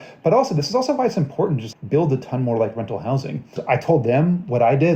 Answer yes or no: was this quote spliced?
yes